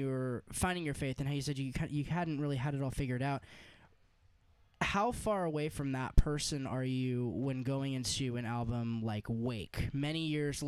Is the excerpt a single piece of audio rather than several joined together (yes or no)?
yes